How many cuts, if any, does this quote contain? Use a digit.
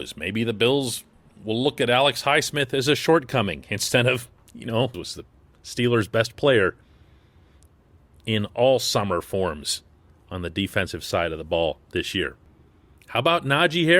1